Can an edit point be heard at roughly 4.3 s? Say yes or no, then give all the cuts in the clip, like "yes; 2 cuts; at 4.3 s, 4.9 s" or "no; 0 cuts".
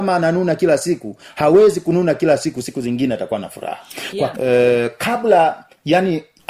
yes; 1 cut; at 4.3 s